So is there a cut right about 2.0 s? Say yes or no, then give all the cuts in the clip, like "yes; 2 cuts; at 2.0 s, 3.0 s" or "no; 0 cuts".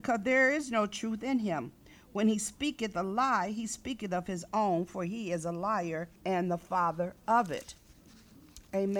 no; 1 cut; at 6.2 s